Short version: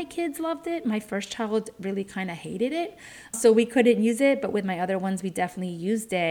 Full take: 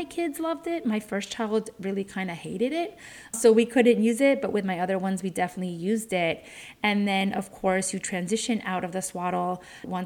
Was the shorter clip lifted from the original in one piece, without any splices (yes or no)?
yes